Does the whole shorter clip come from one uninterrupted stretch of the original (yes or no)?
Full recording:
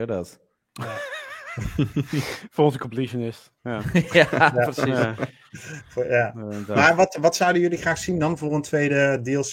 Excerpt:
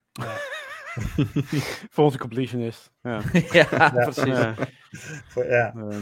yes